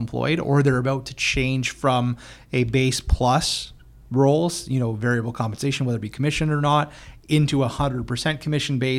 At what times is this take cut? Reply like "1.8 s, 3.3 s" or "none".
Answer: none